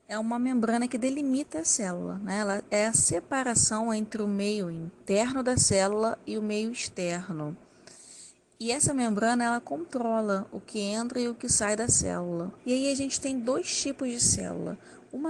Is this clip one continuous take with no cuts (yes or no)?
no